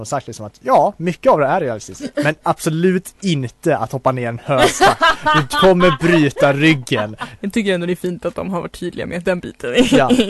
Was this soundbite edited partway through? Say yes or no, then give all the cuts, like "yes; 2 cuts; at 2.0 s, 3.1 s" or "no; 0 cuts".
yes; 2 cuts; at 7.4 s, 9.2 s